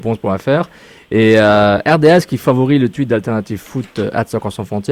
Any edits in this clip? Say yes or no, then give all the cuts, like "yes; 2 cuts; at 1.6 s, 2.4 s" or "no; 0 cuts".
no; 0 cuts